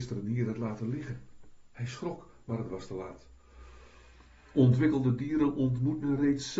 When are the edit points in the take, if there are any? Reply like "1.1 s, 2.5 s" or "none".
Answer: none